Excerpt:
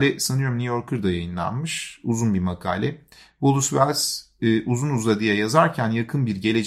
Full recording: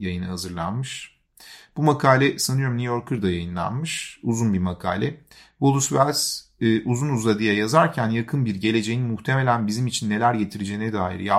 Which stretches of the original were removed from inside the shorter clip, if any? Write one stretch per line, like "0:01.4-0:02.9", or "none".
none